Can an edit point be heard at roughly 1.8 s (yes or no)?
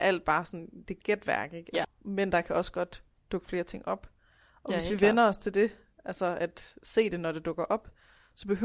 yes